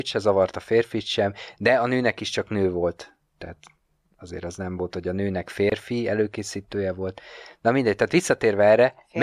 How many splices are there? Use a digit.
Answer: 0